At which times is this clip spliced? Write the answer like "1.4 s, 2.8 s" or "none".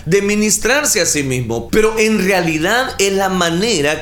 1.7 s

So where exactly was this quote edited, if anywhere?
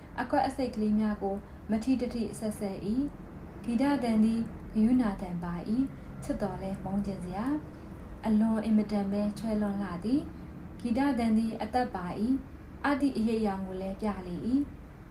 13.0 s

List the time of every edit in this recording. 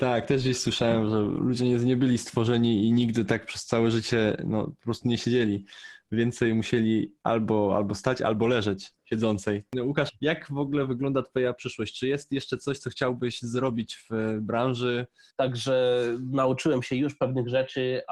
9.0 s, 10.1 s, 15.3 s

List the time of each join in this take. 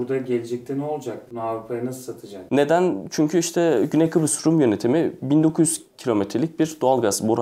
1.3 s, 2.5 s

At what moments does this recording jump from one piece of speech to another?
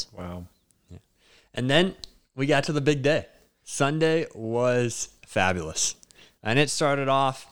none

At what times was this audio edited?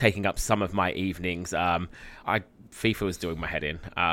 2.2 s

